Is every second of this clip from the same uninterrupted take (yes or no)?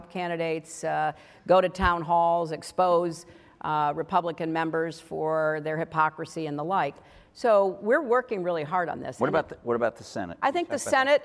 yes